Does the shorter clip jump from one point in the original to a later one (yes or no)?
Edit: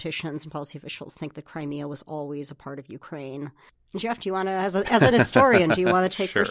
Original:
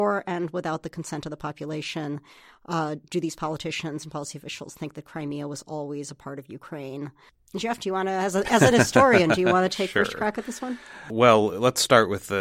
no